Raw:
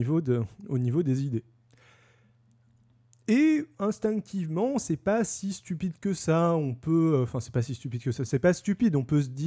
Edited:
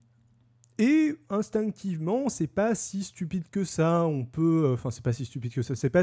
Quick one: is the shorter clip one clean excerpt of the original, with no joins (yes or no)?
yes